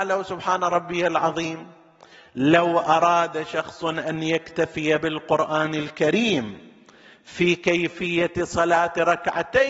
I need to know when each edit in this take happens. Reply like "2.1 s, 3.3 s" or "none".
none

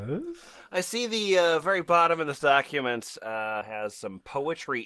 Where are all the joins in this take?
3.6 s

